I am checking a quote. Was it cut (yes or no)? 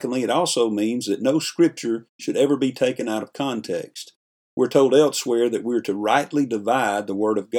no